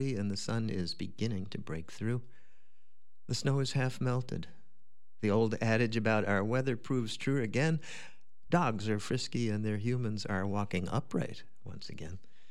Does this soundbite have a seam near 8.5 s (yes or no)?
yes